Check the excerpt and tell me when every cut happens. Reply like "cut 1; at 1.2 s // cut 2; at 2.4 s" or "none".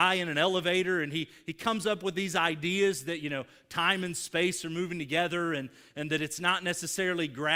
none